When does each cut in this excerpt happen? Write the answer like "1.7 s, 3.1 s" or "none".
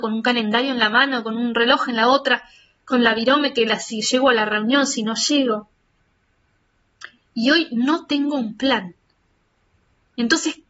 none